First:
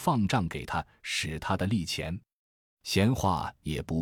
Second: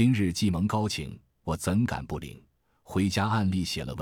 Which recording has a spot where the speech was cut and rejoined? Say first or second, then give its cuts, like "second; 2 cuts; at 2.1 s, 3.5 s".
first; 1 cut; at 2.6 s